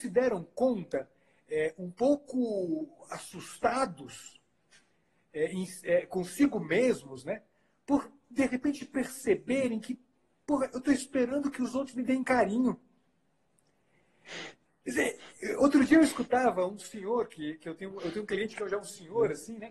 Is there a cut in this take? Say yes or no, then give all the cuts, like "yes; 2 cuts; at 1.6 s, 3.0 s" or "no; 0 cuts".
no; 0 cuts